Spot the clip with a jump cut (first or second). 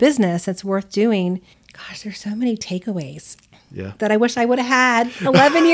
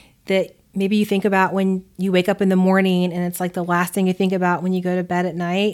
first